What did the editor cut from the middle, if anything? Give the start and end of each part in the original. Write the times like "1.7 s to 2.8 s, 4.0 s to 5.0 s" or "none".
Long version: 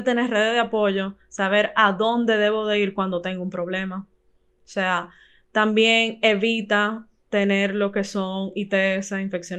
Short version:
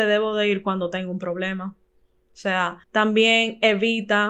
5.1 s to 5.4 s